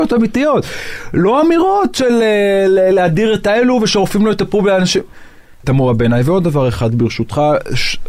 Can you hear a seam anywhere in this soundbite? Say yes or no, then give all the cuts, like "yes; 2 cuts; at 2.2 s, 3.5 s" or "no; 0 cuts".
yes; 1 cut; at 5.6 s